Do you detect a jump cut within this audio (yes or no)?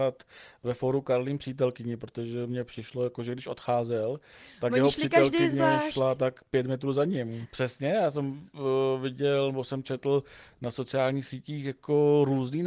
yes